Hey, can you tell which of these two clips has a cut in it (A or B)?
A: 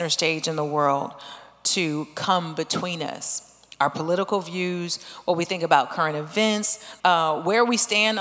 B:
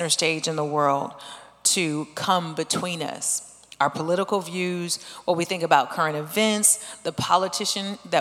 A